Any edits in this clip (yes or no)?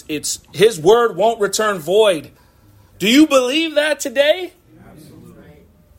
no